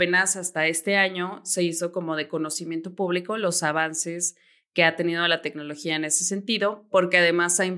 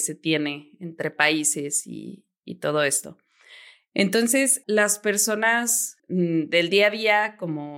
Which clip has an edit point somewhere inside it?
second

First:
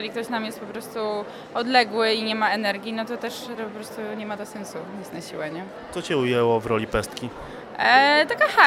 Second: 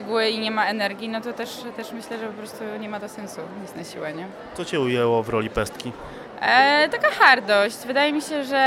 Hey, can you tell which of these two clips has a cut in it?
first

